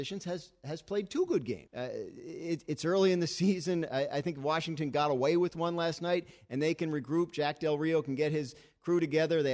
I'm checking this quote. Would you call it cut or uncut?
cut